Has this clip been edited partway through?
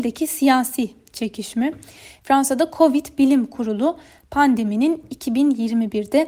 yes; 1 cut; at 2.2 s

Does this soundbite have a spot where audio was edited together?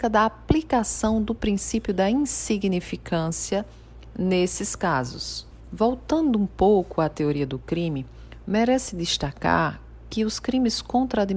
yes; 1 cut; at 5.6 s

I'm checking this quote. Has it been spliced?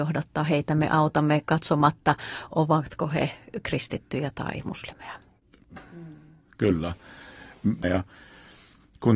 yes; 2 cuts; at 5.8 s, 7.8 s

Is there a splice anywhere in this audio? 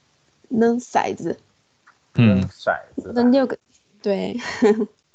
no; 0 cuts

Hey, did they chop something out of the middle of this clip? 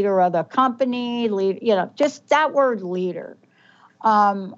no; 0 cuts

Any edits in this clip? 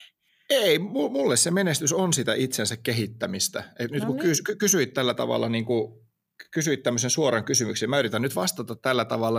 no; 0 cuts

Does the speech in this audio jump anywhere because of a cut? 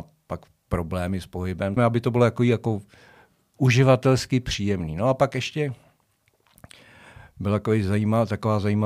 yes; 1 cut; at 1.8 s

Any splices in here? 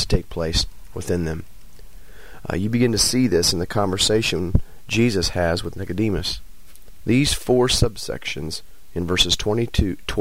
yes; 1 cut; at 7.0 s

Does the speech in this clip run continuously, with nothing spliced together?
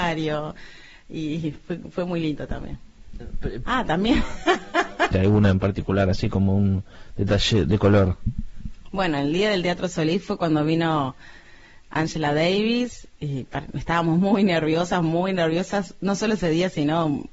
no; 2 cuts; at 3.6 s, 5.1 s

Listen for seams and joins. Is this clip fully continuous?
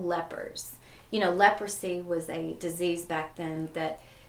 yes; 0 cuts

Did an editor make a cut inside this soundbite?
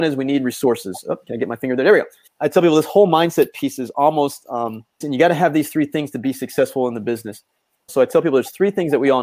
yes; 3 cuts; at 2.3 s, 5.0 s, 7.9 s

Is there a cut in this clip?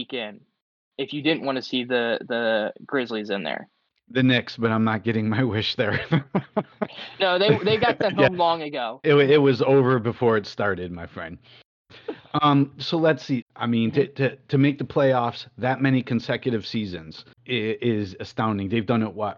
yes; 3 cuts; at 9.0 s, 13.4 s, 17.3 s

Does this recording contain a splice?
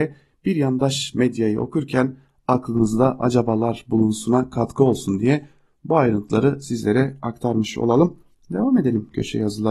no; 0 cuts

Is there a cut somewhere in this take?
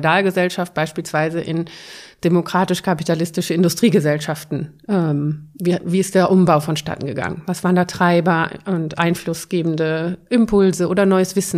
no; 0 cuts

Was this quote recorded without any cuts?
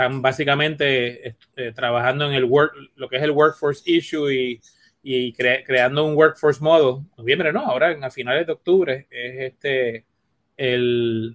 no; 1 cut; at 7.1 s

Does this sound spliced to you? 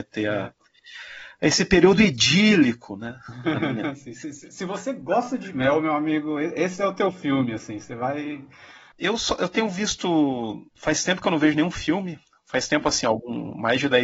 yes; 1 cut; at 8.9 s

